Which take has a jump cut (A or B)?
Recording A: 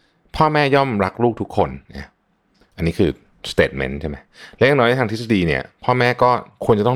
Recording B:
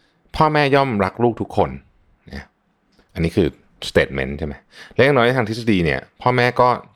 A